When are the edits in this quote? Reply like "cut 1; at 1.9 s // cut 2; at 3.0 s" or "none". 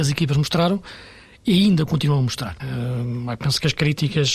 cut 1; at 2.6 s